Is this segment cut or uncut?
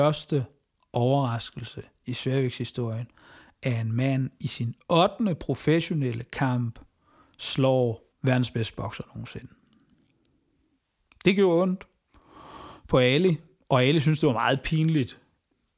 cut